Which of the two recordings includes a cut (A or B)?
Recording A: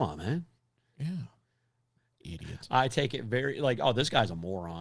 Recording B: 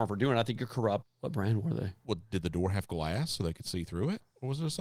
B